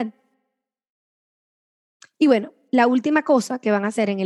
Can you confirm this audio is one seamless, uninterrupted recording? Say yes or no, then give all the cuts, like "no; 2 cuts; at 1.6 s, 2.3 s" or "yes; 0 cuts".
yes; 0 cuts